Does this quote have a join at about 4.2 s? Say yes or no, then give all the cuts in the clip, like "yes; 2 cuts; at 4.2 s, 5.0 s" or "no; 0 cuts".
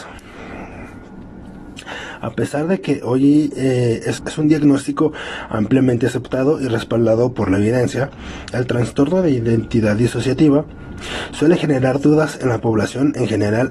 yes; 1 cut; at 4.2 s